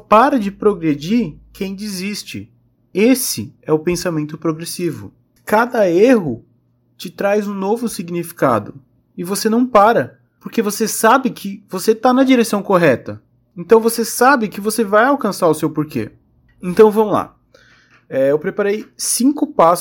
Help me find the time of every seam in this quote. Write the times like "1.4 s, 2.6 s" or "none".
none